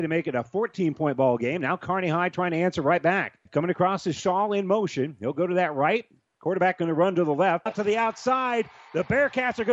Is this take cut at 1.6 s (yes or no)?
no